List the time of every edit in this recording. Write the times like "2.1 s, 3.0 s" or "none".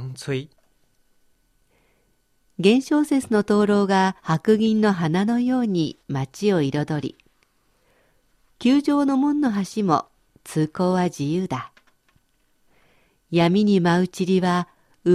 4.2 s